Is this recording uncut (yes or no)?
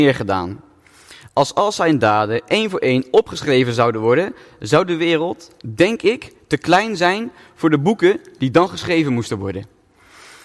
yes